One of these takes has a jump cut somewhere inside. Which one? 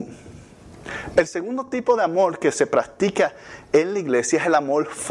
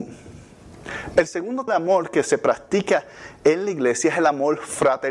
second; 1 cut; at 1.7 s

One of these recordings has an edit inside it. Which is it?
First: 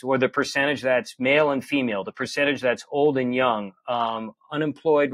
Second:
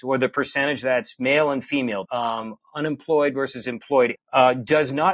second; 2 cuts; at 2.0 s, 4.1 s

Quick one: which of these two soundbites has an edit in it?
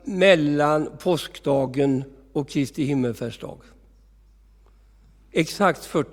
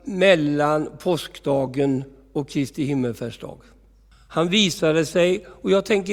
second; 1 cut; at 4.1 s

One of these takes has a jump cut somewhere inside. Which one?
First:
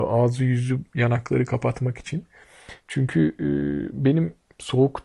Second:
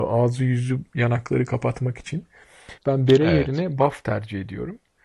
second; 1 cut; at 2.8 s

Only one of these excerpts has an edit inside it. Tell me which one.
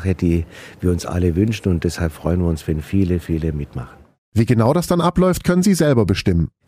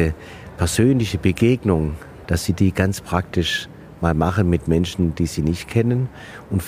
second; 1 cut; at 2.2 s

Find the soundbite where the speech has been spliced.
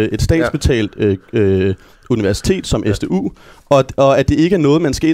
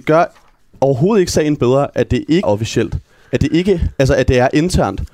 second; 1 cut; at 2.4 s

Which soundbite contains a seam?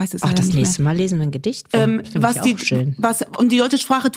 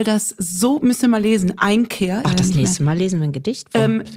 second; 1 cut; at 2.2 s

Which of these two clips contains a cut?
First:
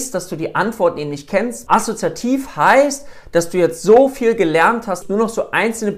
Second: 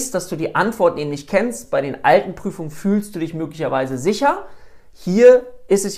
first; 2 cuts; at 1.7 s, 5.0 s

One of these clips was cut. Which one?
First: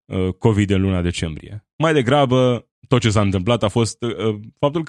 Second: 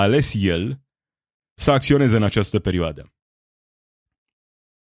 first; 1 cut; at 2.7 s

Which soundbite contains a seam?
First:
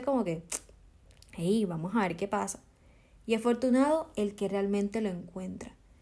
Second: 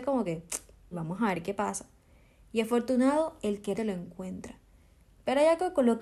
second; 2 cuts; at 0.9 s, 3.8 s

